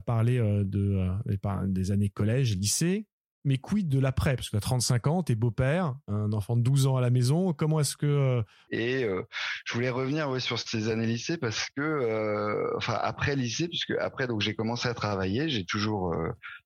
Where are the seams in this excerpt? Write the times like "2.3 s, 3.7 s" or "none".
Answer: 8.7 s

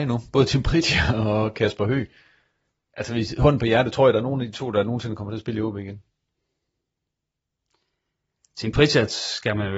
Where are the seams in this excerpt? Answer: none

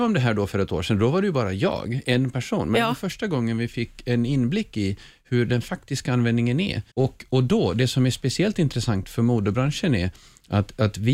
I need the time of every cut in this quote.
6.9 s

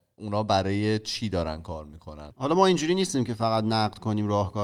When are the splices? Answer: 2.3 s

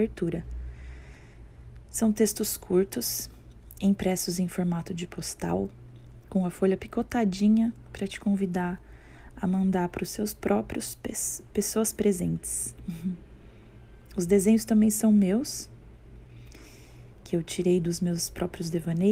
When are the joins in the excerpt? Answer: none

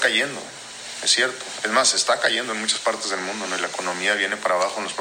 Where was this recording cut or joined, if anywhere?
none

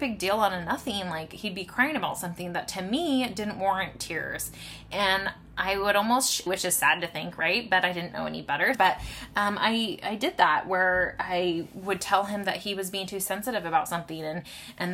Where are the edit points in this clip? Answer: 6.5 s, 8.7 s

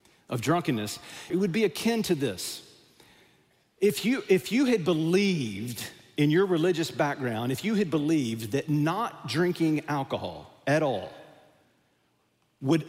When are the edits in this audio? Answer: 1.3 s

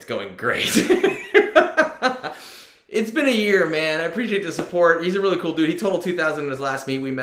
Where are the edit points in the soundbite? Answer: none

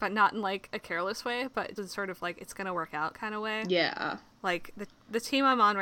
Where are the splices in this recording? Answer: 1.8 s

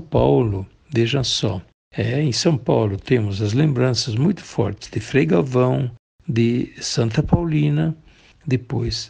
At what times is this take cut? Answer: none

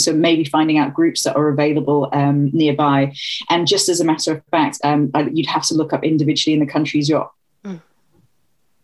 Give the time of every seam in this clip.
4.8 s, 7.5 s

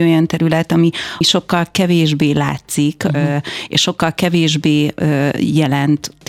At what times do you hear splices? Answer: 1.2 s

